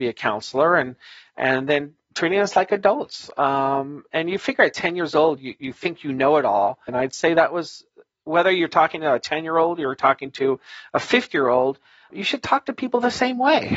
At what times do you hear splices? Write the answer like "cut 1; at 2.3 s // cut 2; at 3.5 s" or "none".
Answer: cut 1; at 6.9 s // cut 2; at 12.1 s